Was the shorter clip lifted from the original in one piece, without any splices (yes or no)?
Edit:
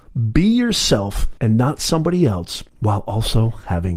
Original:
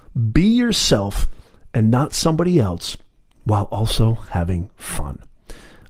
no